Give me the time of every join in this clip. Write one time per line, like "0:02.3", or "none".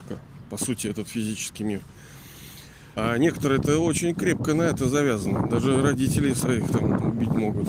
0:03.0